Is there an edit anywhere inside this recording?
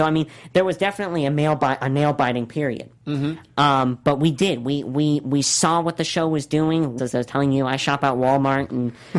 yes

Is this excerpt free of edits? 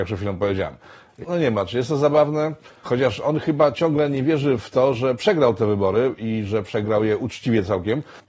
no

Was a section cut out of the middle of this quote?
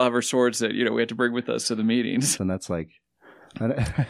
yes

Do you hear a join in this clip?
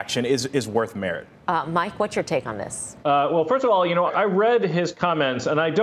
yes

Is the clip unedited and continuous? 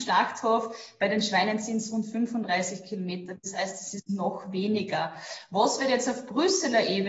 yes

